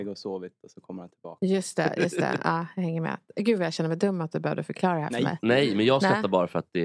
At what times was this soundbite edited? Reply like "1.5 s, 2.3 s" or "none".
none